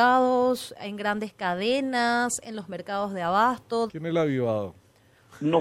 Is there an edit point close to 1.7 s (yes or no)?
no